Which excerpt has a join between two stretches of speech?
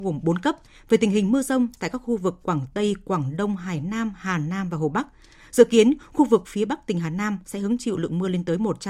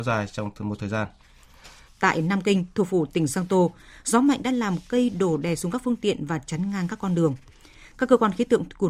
second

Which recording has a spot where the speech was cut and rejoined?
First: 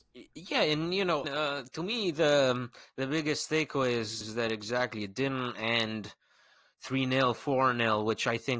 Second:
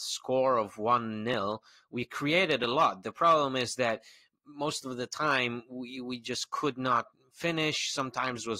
first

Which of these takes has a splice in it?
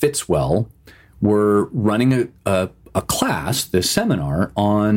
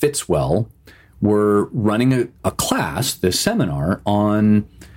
second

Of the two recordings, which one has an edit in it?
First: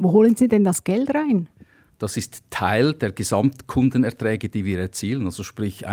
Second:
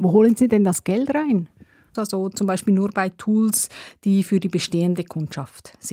second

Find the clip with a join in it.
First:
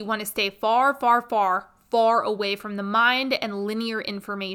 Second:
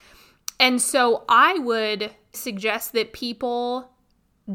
second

